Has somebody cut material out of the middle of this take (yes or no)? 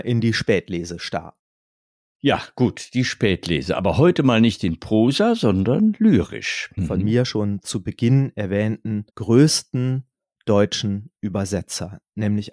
yes